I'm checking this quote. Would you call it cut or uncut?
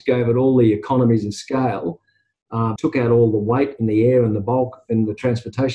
cut